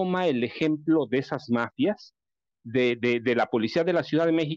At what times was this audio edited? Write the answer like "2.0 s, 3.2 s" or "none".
none